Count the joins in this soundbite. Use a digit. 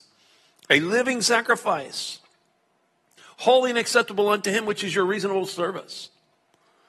0